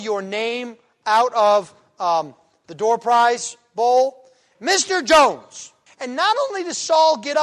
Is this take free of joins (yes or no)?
no